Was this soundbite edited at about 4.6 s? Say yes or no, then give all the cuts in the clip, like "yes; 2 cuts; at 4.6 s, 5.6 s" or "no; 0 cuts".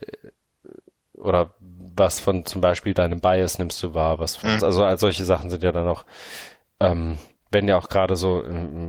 yes; 1 cut; at 4.6 s